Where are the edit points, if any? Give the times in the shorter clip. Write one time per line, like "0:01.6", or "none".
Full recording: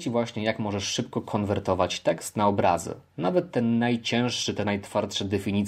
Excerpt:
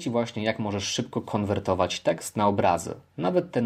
none